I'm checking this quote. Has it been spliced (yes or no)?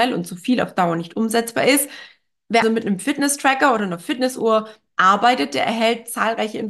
yes